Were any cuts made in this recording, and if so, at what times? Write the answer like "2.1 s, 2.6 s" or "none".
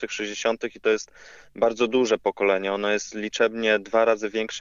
none